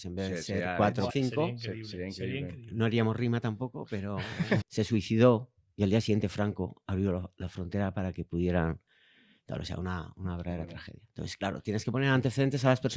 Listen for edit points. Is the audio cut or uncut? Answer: cut